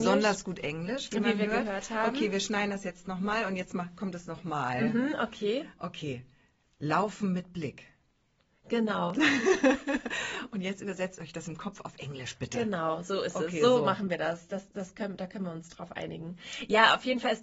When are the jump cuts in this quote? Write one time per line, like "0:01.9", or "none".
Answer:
none